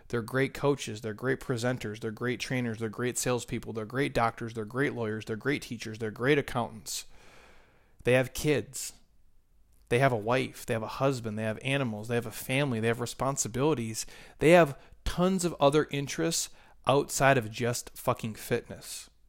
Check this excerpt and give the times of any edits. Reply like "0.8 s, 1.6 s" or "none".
none